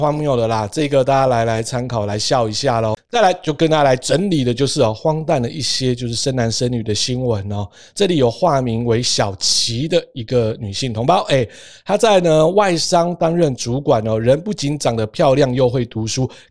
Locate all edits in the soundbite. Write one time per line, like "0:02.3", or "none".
none